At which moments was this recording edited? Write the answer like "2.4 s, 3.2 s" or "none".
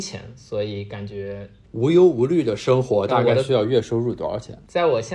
1.6 s